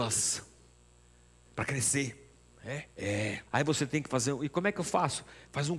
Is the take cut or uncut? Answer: cut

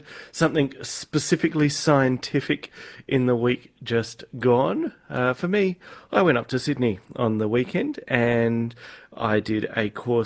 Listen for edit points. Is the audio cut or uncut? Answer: uncut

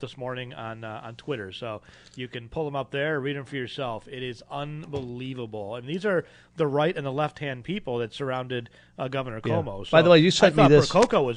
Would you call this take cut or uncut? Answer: uncut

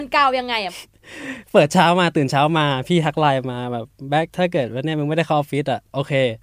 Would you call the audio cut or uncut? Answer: cut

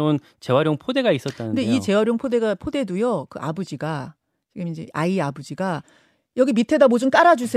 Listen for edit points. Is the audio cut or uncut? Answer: cut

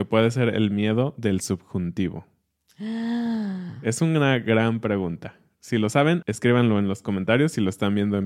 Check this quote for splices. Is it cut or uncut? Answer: cut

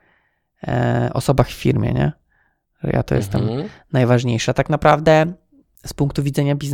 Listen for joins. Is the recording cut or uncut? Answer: uncut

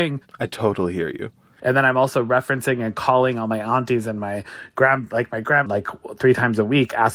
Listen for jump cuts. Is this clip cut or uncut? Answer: cut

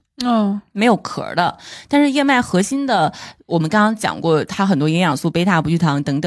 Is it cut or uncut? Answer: uncut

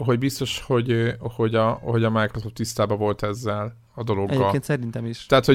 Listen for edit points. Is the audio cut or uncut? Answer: uncut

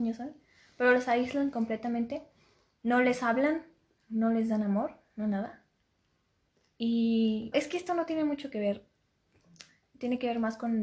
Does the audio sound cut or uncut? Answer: cut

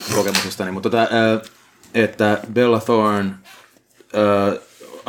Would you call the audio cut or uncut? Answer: uncut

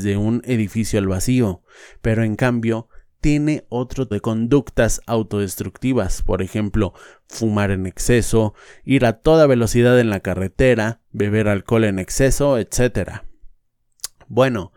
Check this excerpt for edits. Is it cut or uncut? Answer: cut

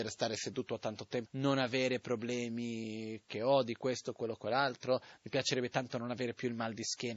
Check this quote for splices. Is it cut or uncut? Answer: cut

